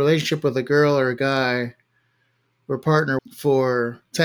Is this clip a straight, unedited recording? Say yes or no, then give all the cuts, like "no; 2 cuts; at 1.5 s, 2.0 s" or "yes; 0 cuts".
no; 1 cut; at 3.2 s